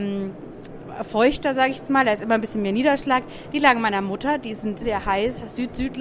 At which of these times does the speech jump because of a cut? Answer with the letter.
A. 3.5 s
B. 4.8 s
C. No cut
B